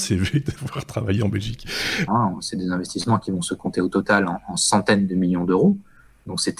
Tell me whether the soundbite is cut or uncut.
cut